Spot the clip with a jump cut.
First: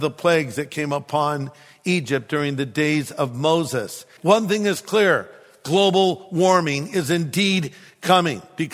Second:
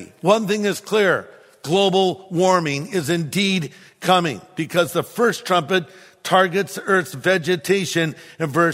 first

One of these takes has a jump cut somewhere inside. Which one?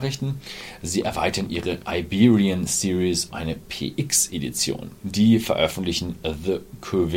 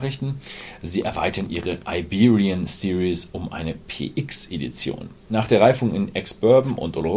first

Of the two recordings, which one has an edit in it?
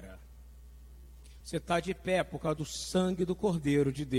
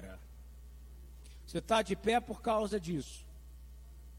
second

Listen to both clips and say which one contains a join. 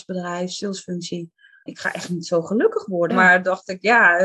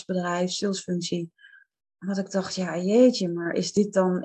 first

